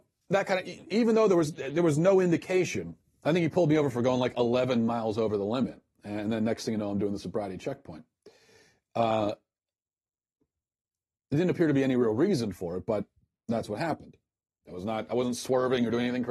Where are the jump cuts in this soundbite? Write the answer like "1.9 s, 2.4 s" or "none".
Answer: 14.7 s

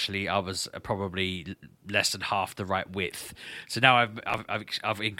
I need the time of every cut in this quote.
none

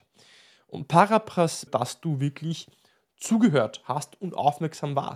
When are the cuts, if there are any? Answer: 1.7 s

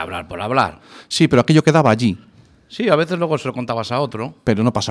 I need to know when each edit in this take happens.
none

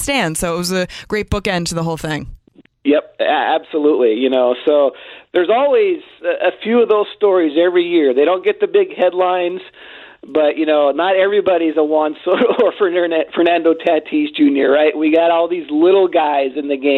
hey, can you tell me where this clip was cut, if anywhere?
none

